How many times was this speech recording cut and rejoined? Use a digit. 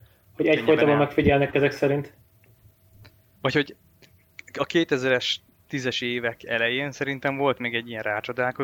1